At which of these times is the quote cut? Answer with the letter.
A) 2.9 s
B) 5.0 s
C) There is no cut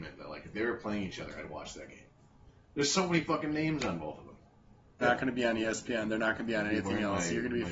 B